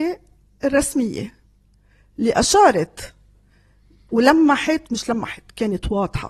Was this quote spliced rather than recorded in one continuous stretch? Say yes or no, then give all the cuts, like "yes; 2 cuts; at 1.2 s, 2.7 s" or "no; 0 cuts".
no; 0 cuts